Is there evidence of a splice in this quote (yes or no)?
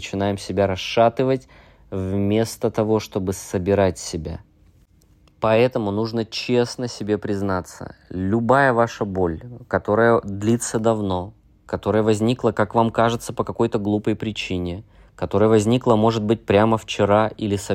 no